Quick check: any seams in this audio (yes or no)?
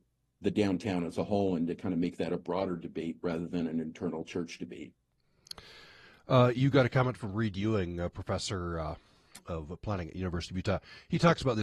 no